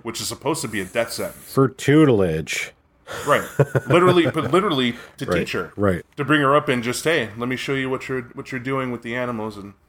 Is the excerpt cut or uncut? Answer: uncut